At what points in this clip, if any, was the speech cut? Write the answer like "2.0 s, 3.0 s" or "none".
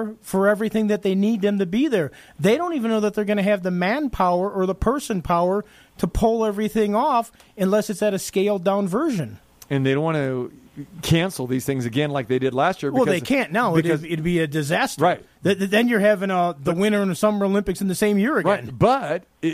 none